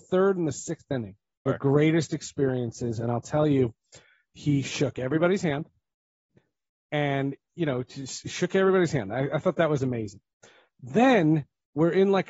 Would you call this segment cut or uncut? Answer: cut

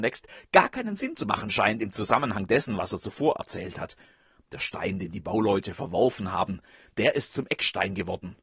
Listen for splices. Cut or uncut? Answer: uncut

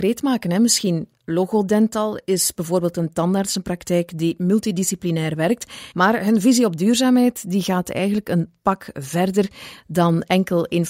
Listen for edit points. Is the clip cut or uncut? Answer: cut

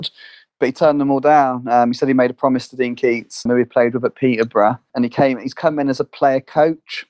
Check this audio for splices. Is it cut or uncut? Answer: cut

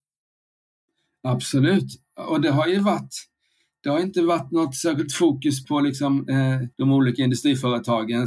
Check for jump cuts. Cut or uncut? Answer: cut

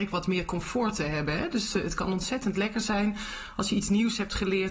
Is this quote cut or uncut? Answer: uncut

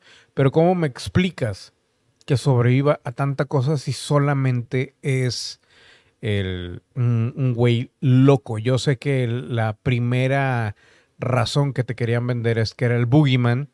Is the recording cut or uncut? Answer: uncut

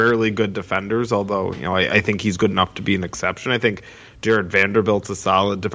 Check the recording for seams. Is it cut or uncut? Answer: uncut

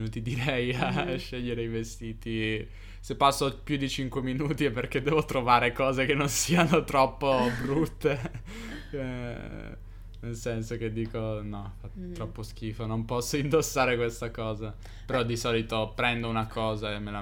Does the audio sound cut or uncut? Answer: uncut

